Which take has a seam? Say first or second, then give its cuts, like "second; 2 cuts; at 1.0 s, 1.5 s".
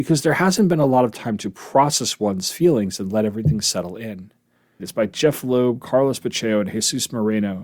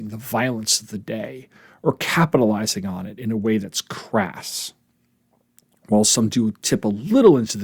first; 1 cut; at 4.8 s